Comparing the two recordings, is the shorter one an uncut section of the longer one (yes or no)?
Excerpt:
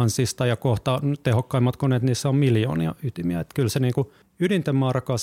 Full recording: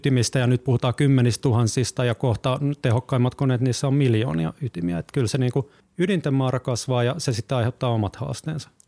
yes